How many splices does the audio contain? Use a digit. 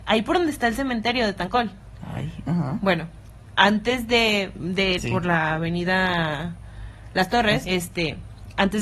2